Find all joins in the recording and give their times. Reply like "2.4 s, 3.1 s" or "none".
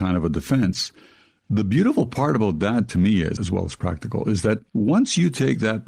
3.4 s